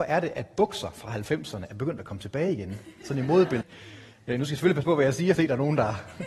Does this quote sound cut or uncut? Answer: cut